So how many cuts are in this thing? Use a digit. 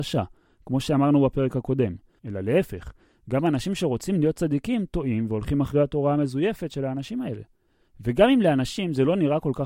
2